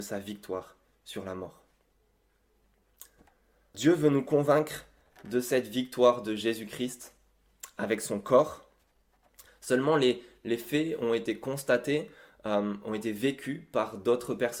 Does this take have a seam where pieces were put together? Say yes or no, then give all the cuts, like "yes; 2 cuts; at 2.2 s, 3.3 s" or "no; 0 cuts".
yes; 1 cut; at 3.7 s